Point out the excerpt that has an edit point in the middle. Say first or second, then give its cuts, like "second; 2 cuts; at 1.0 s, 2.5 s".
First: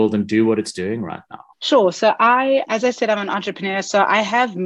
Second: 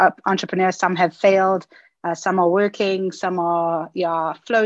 first; 2 cuts; at 1.5 s, 2.6 s